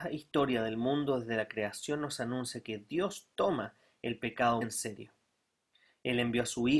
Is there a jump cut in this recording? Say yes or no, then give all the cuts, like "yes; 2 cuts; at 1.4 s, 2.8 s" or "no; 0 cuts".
yes; 1 cut; at 4.6 s